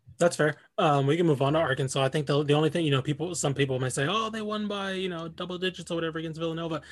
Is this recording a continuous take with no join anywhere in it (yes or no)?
yes